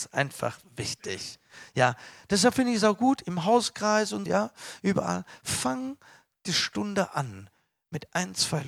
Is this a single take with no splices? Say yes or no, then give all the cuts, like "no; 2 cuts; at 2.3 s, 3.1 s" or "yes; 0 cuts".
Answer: no; 1 cut; at 4.3 s